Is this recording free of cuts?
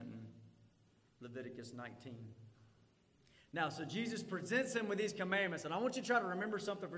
yes; 0 cuts

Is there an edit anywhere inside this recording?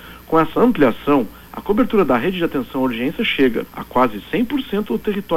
yes; 1 cut; at 3.7 s

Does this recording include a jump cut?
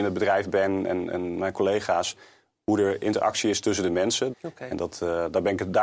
yes; 1 cut; at 4.3 s

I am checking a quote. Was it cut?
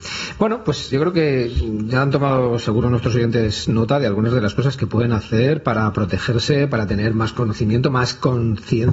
yes; 1 cut; at 0.9 s

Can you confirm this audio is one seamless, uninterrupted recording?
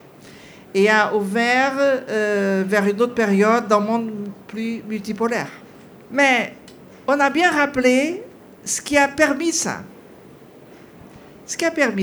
no; 1 cut; at 6.0 s

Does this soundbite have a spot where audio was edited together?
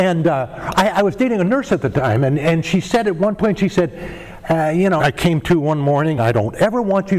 yes; 2 cuts; at 5.0 s, 6.2 s

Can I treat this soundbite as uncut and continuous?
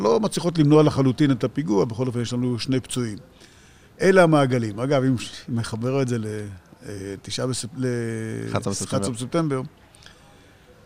yes; 0 cuts

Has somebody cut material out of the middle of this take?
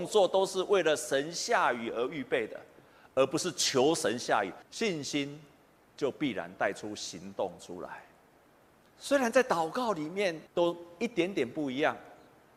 yes; 2 cuts; at 8.9 s, 10.5 s

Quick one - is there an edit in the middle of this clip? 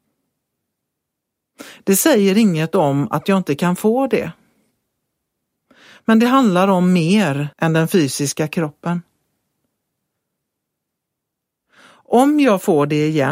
yes; 1 cut; at 7.5 s

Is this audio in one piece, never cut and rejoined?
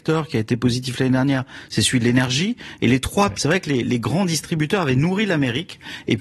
no; 1 cut; at 3.3 s

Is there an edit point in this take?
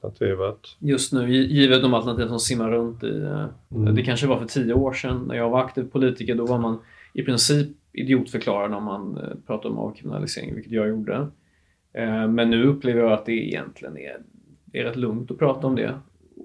yes; 1 cut; at 3.7 s

